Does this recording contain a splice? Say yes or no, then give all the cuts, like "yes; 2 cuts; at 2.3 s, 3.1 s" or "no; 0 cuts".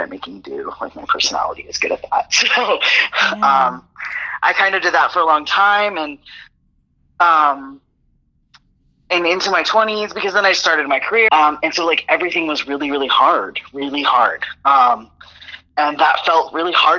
yes; 1 cut; at 11.3 s